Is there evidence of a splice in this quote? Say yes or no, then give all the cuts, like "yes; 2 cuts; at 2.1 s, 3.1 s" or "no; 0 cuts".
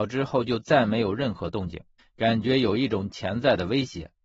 yes; 1 cut; at 2.0 s